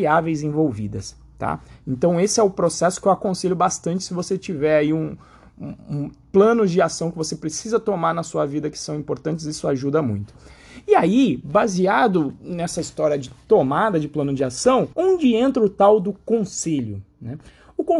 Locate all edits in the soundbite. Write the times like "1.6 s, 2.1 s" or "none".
14.9 s